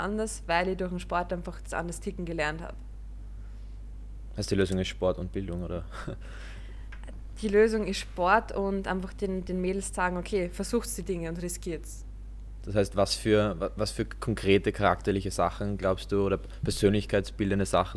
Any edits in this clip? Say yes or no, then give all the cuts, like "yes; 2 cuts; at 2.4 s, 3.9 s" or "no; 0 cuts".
no; 0 cuts